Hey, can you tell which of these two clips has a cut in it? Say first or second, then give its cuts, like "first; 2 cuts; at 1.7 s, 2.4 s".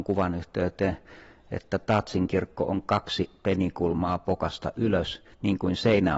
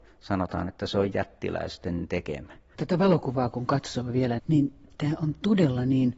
second; 2 cuts; at 2.8 s, 4.4 s